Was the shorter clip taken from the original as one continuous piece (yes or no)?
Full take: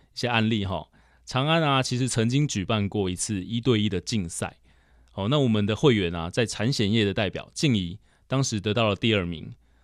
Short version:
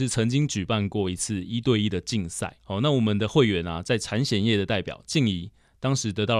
no